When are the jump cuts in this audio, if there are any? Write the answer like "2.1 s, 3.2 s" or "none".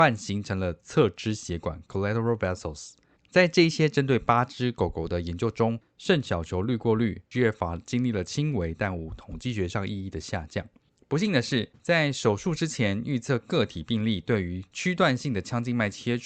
none